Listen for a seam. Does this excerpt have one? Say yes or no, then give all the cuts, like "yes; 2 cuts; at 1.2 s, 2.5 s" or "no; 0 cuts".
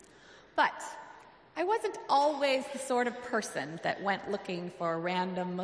no; 0 cuts